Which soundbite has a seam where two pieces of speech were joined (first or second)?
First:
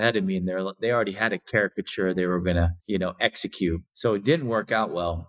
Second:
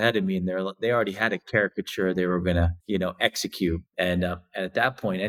second